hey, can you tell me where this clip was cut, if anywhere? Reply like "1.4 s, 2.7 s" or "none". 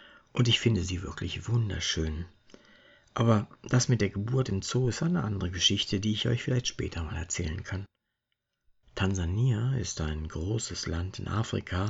8.8 s